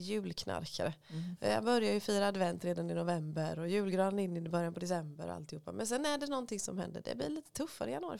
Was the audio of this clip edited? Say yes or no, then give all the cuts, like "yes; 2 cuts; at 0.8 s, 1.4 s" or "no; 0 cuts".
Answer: no; 0 cuts